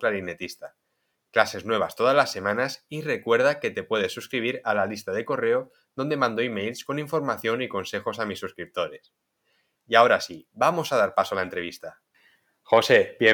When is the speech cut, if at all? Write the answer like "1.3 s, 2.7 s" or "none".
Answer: none